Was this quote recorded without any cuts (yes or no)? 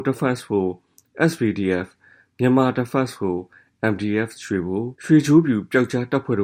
no